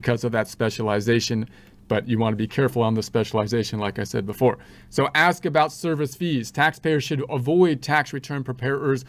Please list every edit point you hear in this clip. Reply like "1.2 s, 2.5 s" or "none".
none